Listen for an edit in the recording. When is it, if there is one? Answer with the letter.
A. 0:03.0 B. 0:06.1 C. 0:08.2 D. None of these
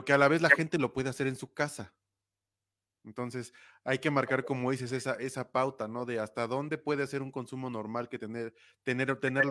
D